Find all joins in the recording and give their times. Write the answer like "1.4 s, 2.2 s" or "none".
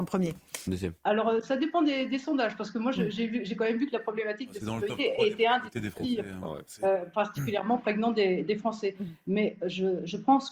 1.0 s